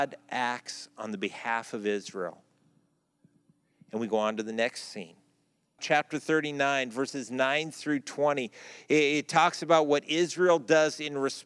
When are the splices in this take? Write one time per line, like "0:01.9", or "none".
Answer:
0:05.8